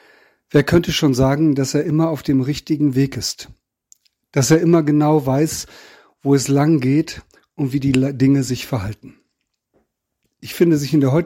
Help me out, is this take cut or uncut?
uncut